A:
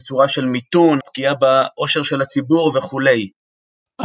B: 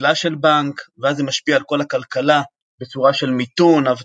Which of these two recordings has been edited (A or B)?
A